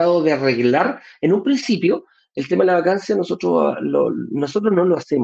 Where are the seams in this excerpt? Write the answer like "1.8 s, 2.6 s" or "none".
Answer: none